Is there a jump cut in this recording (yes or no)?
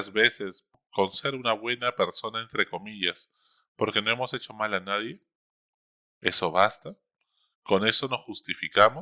no